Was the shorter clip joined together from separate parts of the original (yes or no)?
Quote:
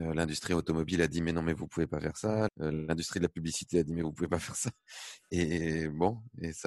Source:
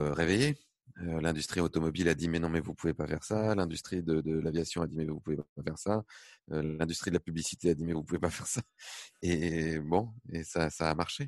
yes